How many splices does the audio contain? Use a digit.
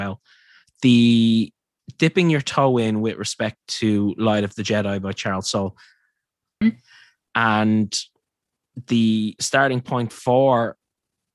1